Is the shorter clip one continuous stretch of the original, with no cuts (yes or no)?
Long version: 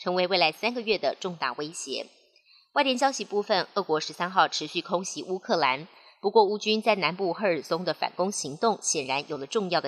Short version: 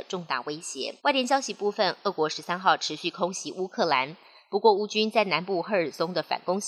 no